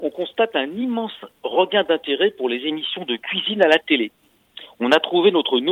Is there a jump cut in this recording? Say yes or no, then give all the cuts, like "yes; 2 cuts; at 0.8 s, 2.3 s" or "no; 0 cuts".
no; 0 cuts